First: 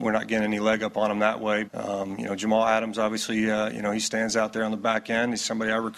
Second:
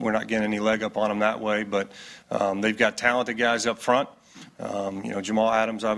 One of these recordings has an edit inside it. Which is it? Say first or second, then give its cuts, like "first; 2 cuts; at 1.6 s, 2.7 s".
first; 1 cut; at 1.6 s